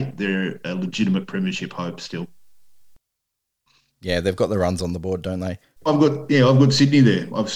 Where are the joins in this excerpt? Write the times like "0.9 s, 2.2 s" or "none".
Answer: 5.8 s